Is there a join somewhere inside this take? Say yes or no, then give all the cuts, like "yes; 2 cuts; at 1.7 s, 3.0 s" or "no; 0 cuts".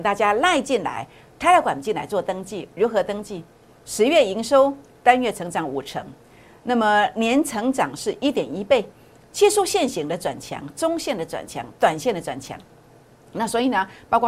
yes; 1 cut; at 3.7 s